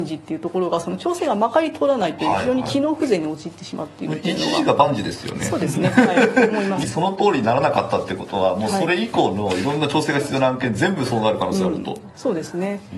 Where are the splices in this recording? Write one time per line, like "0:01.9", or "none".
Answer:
0:06.8